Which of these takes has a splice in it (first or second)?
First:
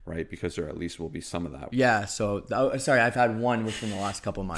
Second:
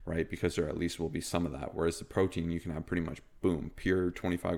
first